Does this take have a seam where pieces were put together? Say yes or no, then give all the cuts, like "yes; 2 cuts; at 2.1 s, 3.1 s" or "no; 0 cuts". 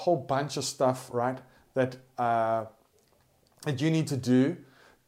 no; 0 cuts